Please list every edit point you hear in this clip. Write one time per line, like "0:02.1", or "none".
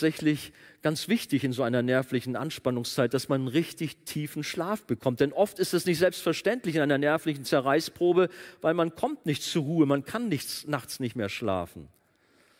none